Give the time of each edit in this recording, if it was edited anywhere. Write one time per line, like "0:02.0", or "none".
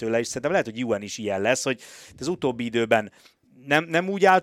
none